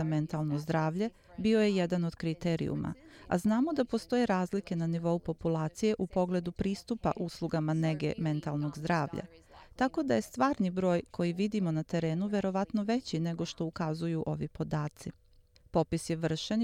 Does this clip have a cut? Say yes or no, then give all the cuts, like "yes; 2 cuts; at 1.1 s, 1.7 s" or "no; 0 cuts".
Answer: no; 0 cuts